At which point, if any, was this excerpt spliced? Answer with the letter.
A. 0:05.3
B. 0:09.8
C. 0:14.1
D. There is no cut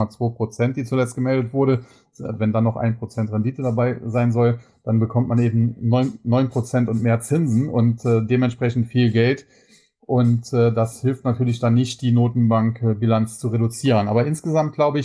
D